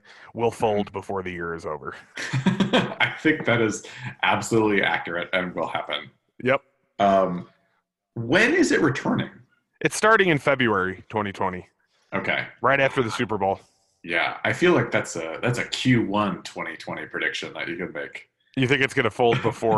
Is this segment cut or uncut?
uncut